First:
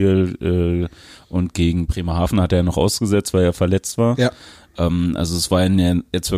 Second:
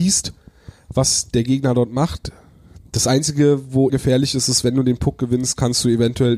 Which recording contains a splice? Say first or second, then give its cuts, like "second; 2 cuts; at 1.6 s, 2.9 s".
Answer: second; 2 cuts; at 2.8 s, 3.9 s